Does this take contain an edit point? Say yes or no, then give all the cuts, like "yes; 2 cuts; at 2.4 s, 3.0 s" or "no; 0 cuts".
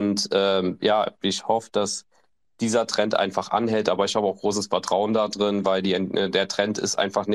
no; 0 cuts